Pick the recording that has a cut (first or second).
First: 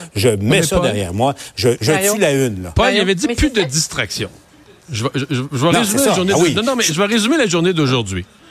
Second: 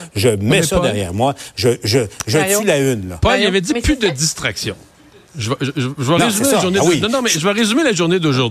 first